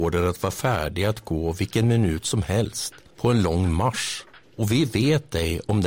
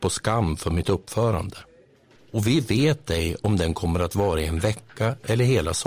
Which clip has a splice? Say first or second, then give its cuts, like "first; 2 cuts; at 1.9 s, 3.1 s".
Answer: second; 1 cut; at 2.2 s